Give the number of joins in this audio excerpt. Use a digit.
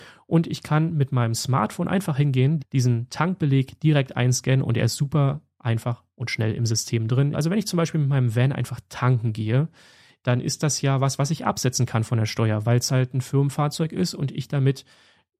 2